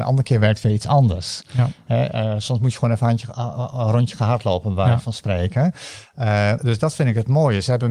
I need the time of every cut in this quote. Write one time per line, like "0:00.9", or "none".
0:06.6